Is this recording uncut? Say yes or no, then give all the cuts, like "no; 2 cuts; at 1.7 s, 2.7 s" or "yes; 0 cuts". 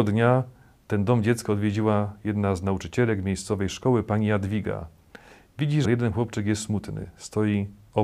no; 1 cut; at 5.8 s